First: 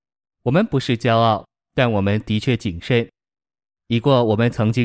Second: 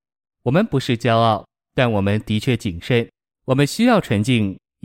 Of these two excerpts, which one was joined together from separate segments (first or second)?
second